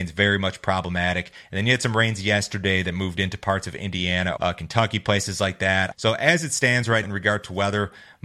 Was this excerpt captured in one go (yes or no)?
no